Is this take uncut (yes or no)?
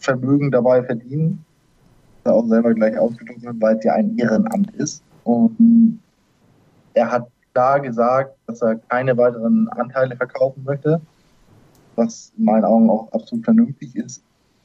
no